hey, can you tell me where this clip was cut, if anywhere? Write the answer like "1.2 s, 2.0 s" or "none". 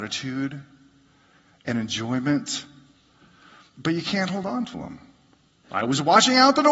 5.6 s